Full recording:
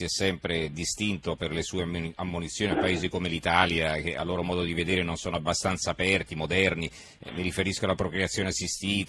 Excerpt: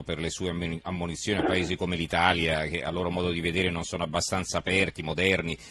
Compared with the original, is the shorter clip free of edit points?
yes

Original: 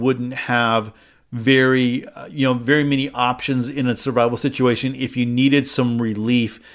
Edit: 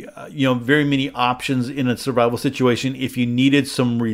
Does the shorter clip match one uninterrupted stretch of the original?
yes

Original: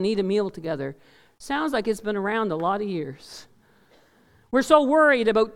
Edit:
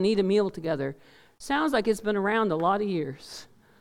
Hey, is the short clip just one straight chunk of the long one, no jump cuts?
yes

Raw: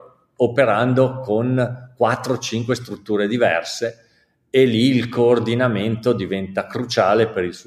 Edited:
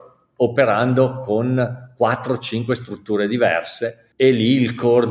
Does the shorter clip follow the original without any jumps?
no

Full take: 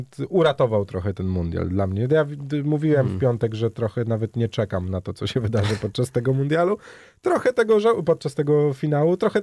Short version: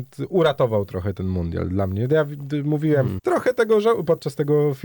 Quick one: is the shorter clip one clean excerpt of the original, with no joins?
no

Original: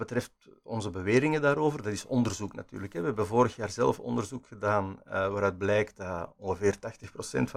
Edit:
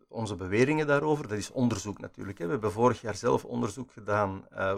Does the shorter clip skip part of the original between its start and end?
no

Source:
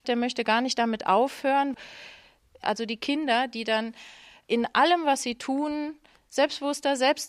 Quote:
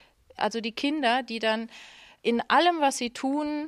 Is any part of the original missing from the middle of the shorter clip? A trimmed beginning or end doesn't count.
no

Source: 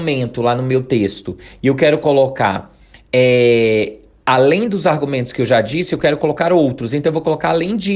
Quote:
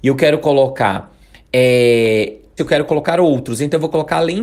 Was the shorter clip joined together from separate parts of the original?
yes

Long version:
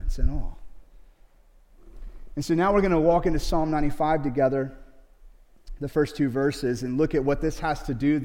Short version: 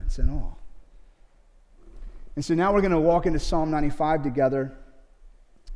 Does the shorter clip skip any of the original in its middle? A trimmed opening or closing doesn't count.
no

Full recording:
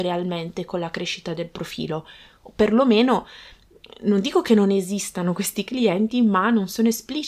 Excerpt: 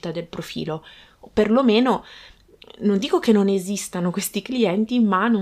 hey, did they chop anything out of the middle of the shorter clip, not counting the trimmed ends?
no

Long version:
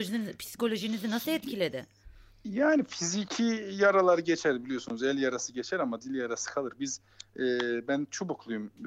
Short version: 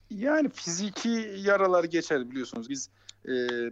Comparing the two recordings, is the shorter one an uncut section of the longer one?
no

